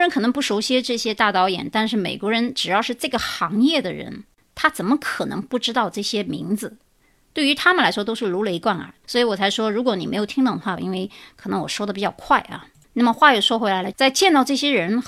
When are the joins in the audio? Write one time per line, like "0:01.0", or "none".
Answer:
0:09.0
0:10.8
0:13.9